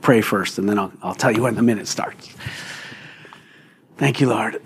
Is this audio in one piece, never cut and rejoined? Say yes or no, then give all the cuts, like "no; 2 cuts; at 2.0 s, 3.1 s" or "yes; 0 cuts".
yes; 0 cuts